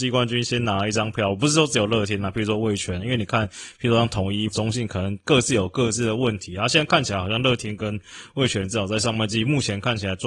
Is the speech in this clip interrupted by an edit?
yes; 1 cut; at 4.5 s

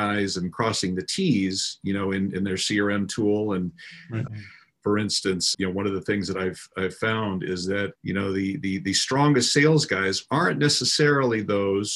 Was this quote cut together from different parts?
yes; 3 cuts; at 4.3 s, 5.5 s, 7.9 s

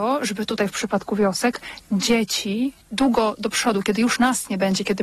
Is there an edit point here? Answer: yes; 1 cut; at 2.8 s

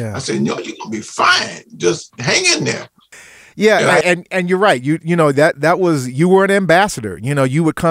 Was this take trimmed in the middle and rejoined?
yes; 1 cut; at 4.0 s

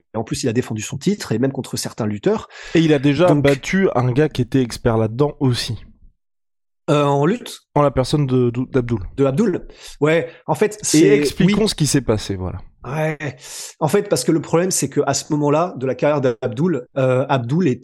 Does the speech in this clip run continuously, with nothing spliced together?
yes; 0 cuts

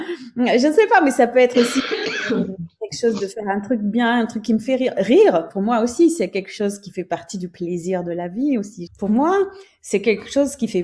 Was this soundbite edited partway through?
yes; 1 cut; at 8.9 s

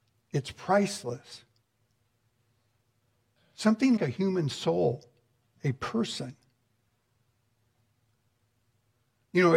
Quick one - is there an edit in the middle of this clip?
yes; 1 cut; at 4.0 s

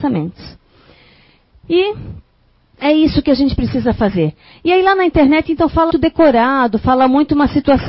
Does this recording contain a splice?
yes; 1 cut; at 5.9 s

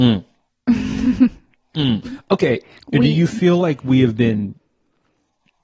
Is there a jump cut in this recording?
yes; 1 cut; at 2.8 s

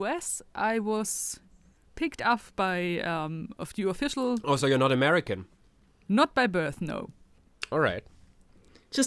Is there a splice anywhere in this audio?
no; 0 cuts

